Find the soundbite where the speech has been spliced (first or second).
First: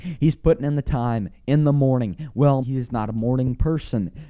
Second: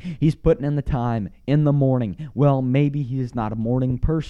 first